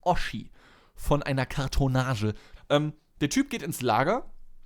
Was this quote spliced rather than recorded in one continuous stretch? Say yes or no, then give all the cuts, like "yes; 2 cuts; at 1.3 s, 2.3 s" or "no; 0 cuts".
yes; 1 cut; at 2.6 s